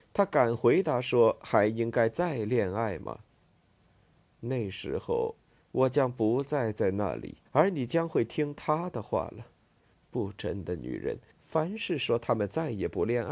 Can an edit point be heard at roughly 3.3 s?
no; 2 cuts; at 7.5 s, 11.3 s

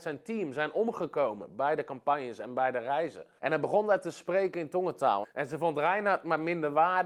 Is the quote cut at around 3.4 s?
yes; 2 cuts; at 3.4 s, 5.2 s

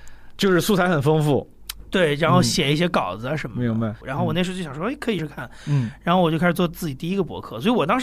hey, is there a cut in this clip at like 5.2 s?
yes; 2 cuts; at 4.0 s, 5.2 s

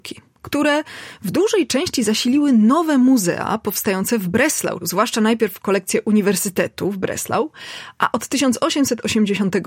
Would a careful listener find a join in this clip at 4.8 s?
yes; 1 cut; at 4.8 s

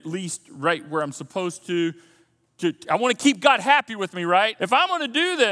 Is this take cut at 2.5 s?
no; 1 cut; at 4.6 s

